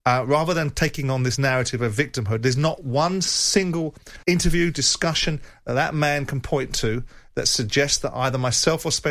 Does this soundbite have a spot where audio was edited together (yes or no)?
yes